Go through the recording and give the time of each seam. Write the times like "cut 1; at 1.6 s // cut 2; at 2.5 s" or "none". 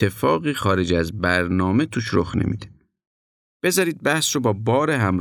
cut 1; at 3.5 s